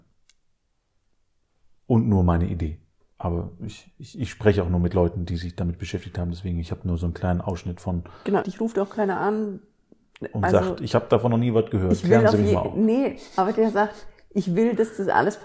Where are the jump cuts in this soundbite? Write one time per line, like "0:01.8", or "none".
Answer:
0:08.4